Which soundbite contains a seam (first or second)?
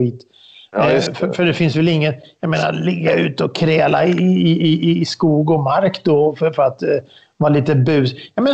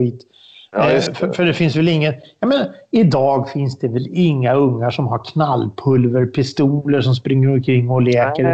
second